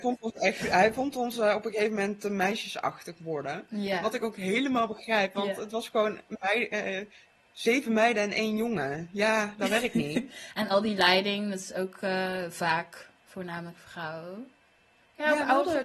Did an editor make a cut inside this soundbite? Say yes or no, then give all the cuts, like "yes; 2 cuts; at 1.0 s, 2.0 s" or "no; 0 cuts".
no; 0 cuts